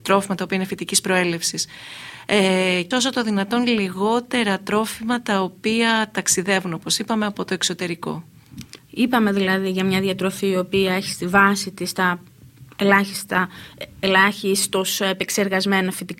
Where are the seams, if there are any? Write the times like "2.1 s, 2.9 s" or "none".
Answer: 2.9 s, 8.8 s